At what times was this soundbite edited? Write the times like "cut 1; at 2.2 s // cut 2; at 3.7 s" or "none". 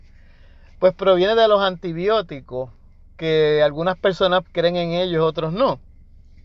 cut 1; at 4.4 s